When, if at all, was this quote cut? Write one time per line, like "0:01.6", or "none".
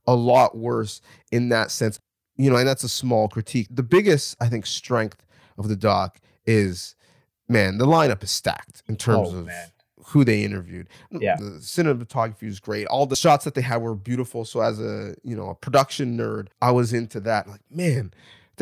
0:11.4
0:16.5